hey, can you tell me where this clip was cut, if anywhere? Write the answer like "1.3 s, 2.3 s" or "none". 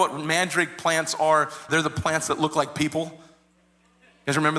1.7 s

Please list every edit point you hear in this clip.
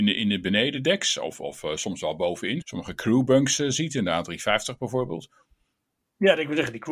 2.6 s

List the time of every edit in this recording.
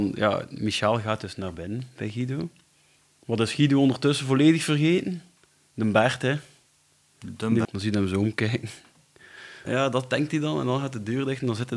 7.6 s, 9.6 s

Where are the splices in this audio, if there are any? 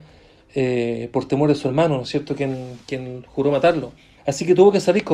4.2 s

